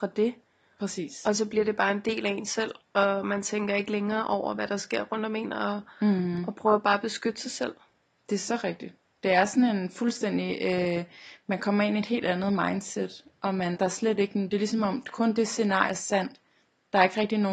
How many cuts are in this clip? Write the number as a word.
two